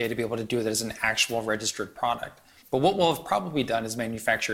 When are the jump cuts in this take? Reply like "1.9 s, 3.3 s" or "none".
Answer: 2.6 s

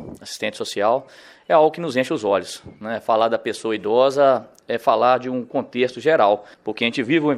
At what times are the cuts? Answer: none

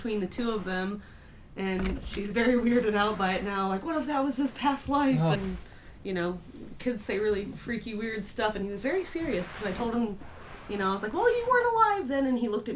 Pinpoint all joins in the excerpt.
5.3 s

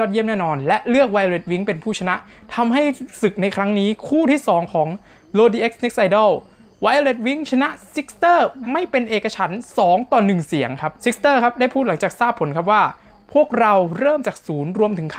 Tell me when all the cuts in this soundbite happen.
8.6 s, 11.0 s

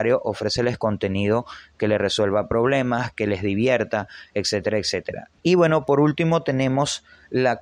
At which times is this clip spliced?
5.4 s

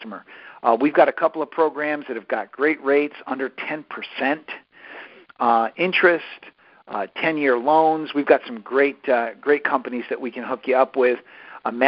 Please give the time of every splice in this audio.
none

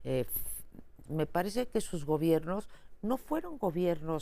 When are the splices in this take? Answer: 1.1 s

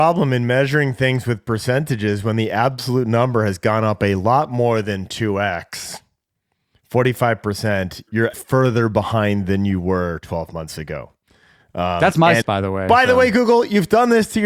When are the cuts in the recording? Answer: 8.3 s, 12.4 s

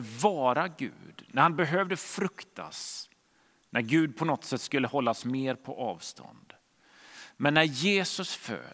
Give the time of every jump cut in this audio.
none

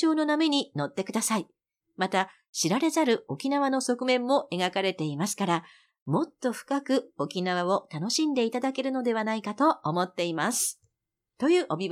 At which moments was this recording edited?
1.8 s

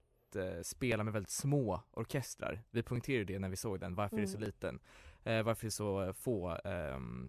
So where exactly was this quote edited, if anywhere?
none

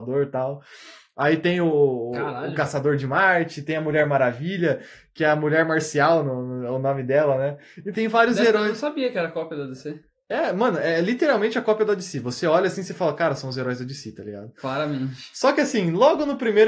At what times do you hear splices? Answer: 7.9 s

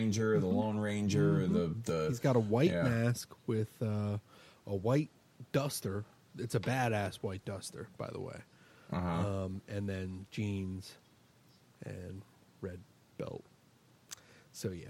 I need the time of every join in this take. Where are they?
none

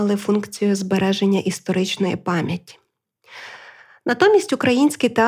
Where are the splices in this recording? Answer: none

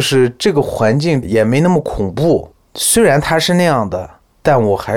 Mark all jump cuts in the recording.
1.2 s

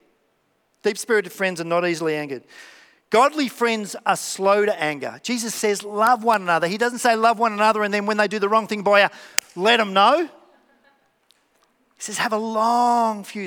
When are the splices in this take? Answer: none

